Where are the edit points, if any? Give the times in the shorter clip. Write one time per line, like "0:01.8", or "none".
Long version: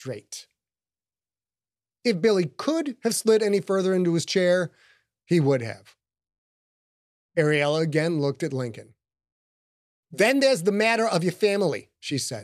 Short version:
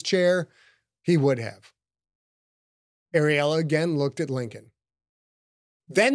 none